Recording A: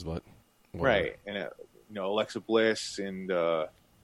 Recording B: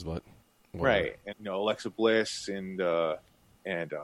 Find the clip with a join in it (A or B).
B